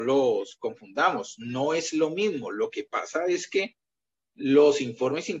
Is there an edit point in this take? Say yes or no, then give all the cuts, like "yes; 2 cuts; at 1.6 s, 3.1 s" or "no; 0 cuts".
no; 0 cuts